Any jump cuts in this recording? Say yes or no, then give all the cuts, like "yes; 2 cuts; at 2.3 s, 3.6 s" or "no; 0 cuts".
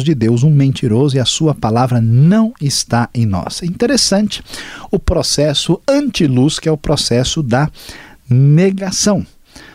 no; 0 cuts